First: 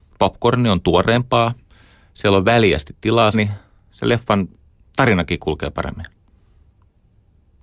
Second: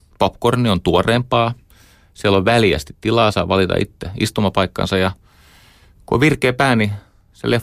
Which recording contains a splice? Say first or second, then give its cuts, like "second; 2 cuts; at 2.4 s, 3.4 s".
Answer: first; 1 cut; at 3.3 s